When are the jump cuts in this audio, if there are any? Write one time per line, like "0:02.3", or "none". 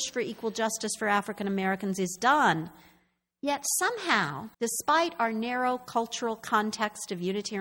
0:03.3
0:04.5